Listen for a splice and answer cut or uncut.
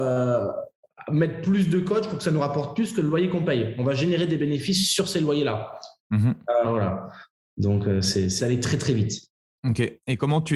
cut